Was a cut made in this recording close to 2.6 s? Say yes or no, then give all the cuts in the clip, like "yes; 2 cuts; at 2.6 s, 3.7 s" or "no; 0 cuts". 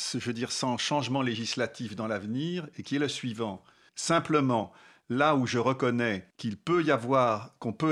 no; 2 cuts; at 3.9 s, 6.3 s